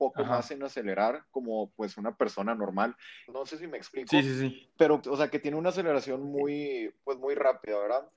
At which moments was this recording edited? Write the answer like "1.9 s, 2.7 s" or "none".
3.3 s, 5.0 s